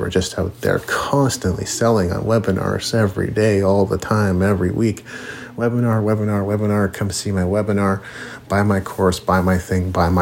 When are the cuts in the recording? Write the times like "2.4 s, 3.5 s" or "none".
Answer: none